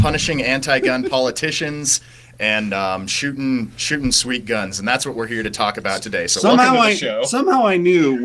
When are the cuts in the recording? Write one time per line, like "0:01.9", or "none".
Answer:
none